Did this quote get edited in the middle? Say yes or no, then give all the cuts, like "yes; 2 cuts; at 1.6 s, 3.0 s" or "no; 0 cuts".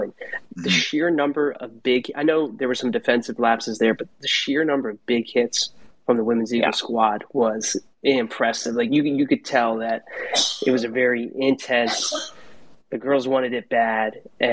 no; 0 cuts